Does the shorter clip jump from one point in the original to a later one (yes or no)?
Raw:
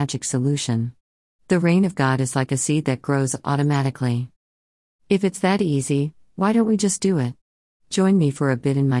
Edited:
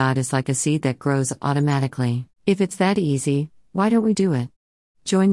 yes